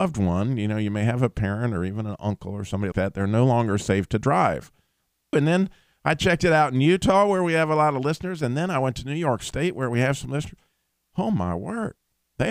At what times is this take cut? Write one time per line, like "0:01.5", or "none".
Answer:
0:02.9
0:05.3